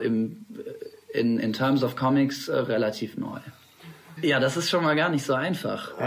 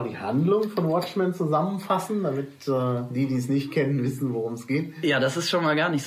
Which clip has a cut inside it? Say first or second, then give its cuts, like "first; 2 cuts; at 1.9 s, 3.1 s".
first; 1 cut; at 4.2 s